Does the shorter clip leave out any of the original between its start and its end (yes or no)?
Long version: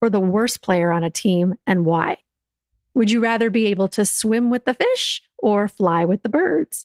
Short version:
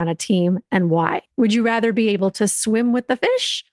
yes